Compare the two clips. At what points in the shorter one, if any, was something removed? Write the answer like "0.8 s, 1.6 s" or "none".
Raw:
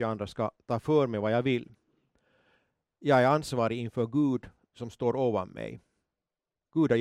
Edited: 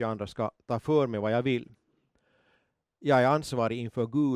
none